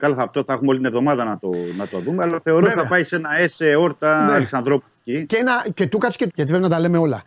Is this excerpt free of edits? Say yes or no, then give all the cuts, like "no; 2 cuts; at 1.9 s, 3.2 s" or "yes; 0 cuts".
no; 2 cuts; at 5.3 s, 6.3 s